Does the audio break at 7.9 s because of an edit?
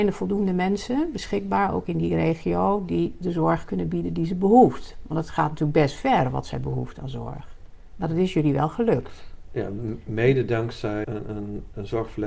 no; 1 cut; at 11.0 s

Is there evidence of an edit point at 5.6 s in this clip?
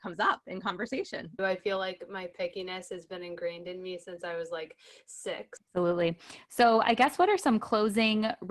yes; 2 cuts; at 1.4 s, 5.6 s

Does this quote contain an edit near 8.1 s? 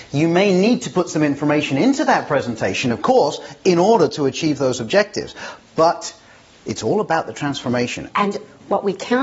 yes; 1 cut; at 8.1 s

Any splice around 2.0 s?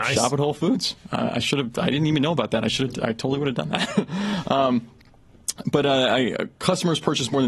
no; 0 cuts

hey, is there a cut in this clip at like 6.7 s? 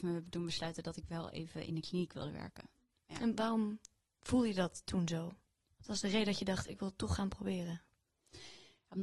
yes; 1 cut; at 6.7 s

